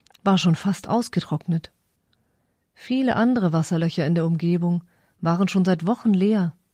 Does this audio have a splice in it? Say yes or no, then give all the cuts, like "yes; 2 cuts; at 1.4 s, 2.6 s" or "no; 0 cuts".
no; 0 cuts